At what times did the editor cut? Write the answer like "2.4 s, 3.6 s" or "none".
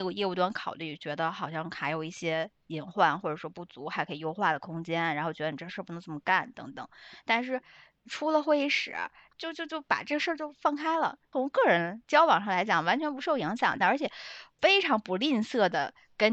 13.8 s